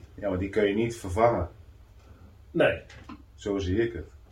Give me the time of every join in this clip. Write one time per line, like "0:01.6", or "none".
none

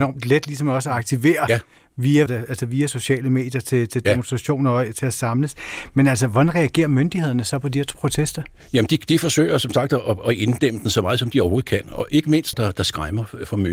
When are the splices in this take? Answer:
0:02.3
0:12.5

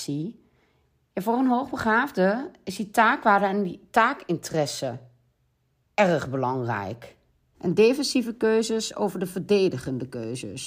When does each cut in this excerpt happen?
0:07.5

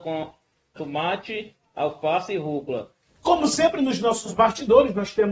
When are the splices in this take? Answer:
0:03.1

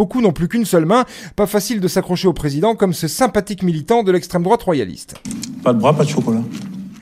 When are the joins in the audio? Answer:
none

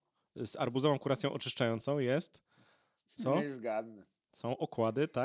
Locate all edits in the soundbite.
none

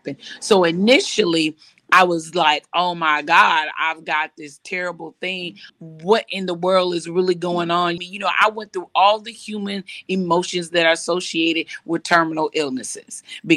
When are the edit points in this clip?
0:05.7
0:08.0

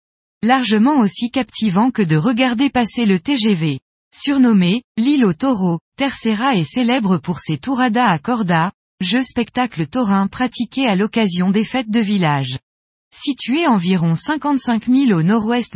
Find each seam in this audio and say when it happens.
0:13.0

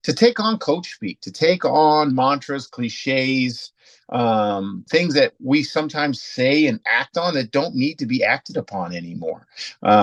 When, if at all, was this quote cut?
0:04.9
0:06.2

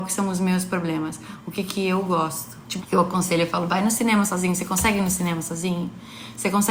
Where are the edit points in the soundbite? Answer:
0:02.8

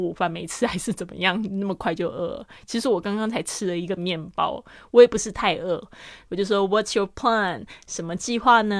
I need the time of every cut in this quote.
0:06.3

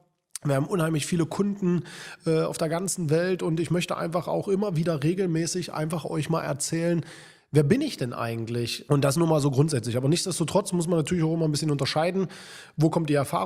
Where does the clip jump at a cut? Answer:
0:08.9

